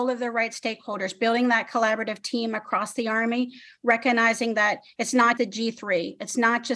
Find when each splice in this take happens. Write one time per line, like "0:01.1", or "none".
0:05.4